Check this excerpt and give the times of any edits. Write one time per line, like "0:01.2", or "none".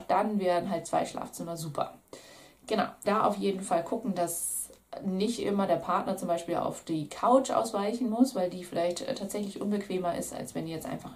0:03.0